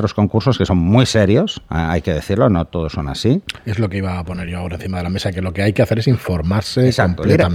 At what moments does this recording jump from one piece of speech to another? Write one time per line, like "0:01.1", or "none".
none